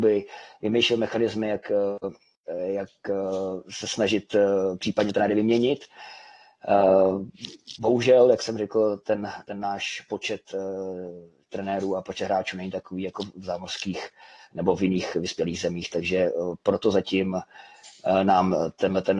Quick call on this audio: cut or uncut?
uncut